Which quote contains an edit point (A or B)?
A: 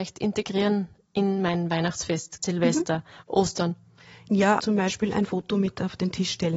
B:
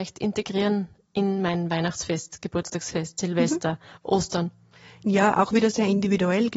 A